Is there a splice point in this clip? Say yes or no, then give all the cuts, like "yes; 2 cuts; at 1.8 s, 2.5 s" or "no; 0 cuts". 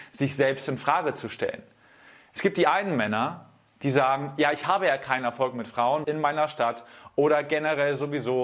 yes; 1 cut; at 6.0 s